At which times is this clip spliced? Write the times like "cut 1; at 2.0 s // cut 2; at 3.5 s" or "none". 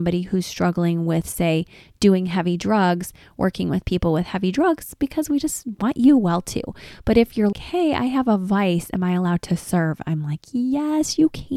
cut 1; at 7.5 s